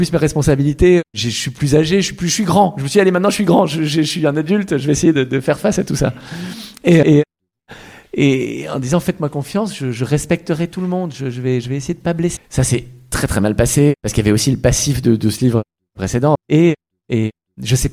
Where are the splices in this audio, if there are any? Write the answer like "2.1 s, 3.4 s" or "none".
7.0 s, 12.4 s, 16.4 s